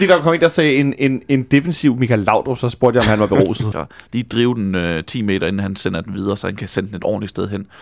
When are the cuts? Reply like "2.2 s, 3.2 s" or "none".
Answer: 3.7 s